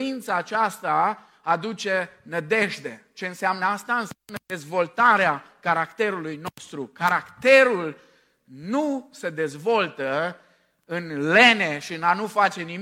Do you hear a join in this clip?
no; 0 cuts

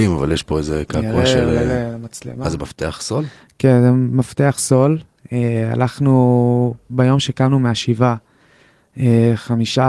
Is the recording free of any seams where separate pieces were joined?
yes; 0 cuts

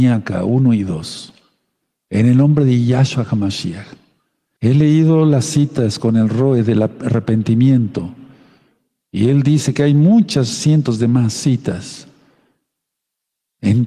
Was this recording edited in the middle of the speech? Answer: yes; 1 cut; at 4.6 s

